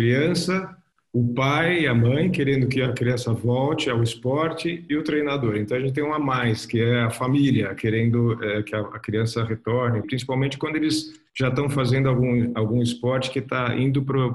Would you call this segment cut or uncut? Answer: cut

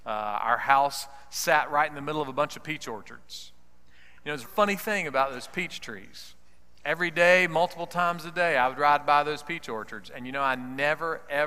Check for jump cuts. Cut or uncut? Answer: cut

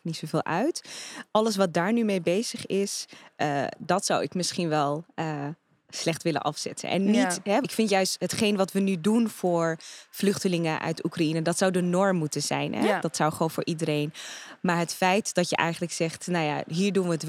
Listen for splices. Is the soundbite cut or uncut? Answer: cut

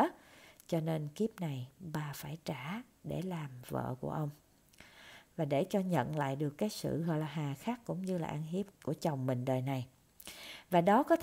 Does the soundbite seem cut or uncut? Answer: cut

